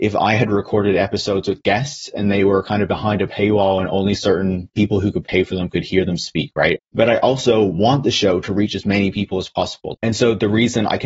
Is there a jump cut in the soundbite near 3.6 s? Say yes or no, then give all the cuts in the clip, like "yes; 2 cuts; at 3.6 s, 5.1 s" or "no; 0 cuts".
no; 2 cuts; at 6.8 s, 9.9 s